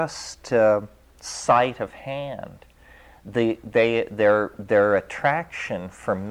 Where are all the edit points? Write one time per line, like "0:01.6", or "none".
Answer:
none